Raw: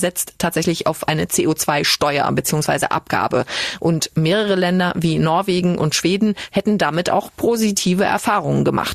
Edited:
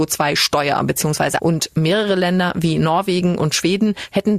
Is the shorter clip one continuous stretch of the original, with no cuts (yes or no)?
no